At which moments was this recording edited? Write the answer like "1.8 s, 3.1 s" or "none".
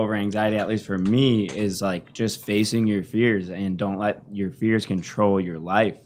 none